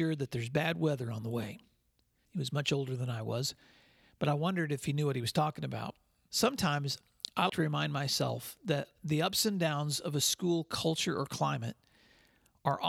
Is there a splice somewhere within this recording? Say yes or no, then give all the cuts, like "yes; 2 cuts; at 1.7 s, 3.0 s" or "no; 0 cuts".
yes; 3 cuts; at 2.3 s, 6.3 s, 7.5 s